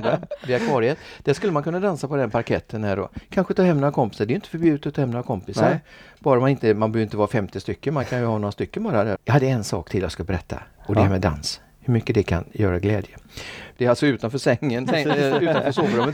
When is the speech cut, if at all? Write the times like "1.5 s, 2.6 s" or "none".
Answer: 9.1 s, 13.7 s, 14.9 s